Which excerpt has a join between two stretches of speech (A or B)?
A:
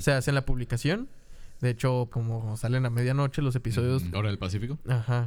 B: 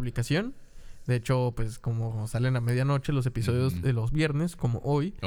A